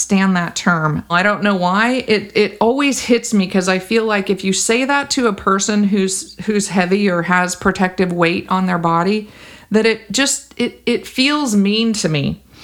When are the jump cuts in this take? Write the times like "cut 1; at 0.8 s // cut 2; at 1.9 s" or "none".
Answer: cut 1; at 1.1 s // cut 2; at 2.3 s

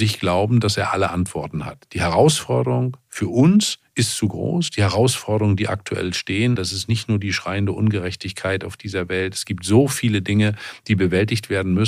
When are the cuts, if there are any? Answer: cut 1; at 6.6 s

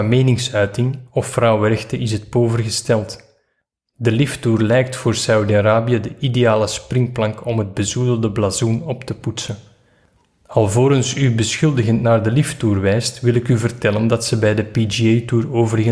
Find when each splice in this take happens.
cut 1; at 1.1 s

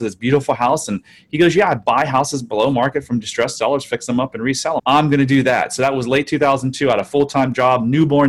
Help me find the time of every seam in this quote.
cut 1; at 4.8 s

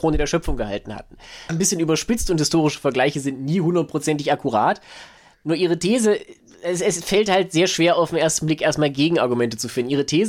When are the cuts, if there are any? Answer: cut 1; at 1.5 s

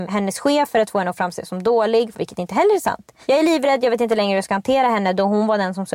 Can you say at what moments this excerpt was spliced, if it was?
cut 1; at 2.1 s

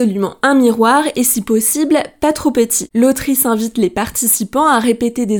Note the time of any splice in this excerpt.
none

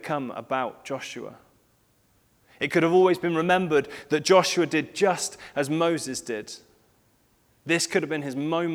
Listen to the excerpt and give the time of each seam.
none

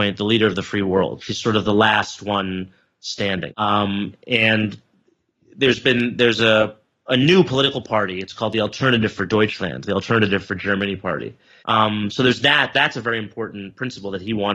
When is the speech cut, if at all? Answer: cut 1; at 3.5 s // cut 2; at 11.6 s

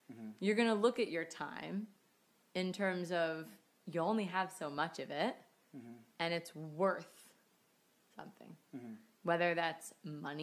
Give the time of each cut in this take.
none

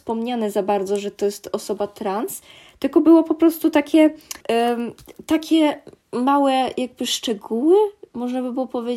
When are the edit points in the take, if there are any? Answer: cut 1; at 4.4 s

